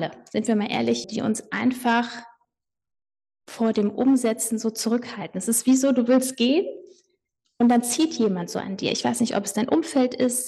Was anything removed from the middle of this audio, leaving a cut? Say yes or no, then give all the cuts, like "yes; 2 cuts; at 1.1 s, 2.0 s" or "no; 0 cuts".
yes; 1 cut; at 1.0 s